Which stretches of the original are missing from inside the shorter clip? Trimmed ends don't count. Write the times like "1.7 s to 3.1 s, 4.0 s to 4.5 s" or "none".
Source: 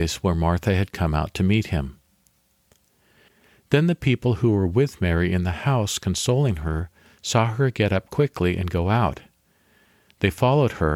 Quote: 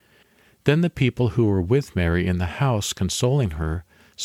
none